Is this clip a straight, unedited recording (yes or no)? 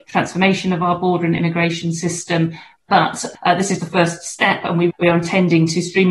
no